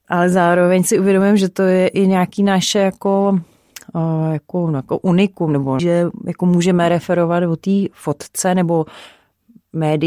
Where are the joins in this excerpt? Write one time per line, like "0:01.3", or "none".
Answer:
0:05.8